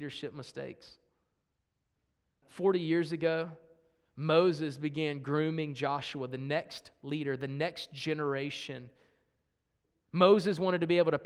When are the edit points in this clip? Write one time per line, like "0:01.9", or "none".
0:02.4

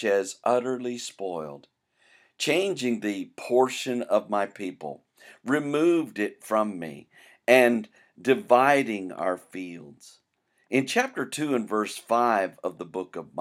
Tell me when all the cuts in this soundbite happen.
none

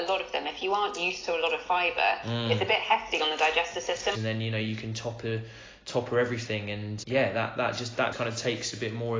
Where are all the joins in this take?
0:04.1
0:07.0
0:08.1

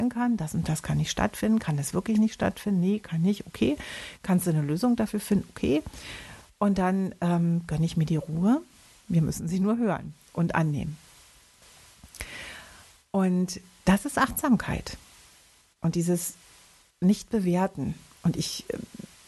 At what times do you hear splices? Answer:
0:08.9

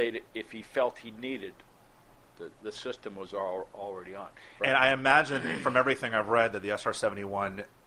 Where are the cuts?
0:02.3
0:04.6

